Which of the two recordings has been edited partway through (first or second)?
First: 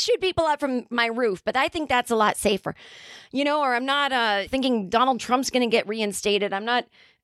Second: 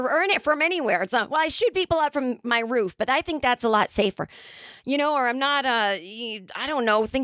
first